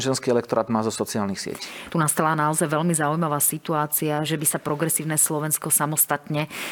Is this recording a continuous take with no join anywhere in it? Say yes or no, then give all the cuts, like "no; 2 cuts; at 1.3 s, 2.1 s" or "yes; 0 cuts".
no; 2 cuts; at 1.9 s, 4.3 s